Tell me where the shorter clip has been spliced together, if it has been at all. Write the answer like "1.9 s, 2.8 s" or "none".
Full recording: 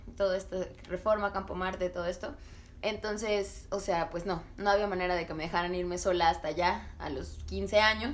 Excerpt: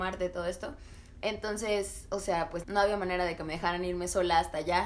2.6 s